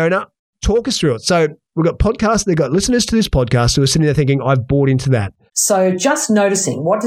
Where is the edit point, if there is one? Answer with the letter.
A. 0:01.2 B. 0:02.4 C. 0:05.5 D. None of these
C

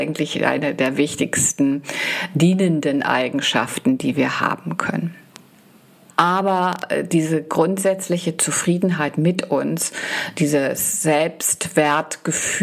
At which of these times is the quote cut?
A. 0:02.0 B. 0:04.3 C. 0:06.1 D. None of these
C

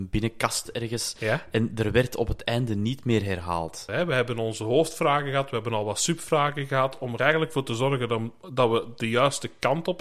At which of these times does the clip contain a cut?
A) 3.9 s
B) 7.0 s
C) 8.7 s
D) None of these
A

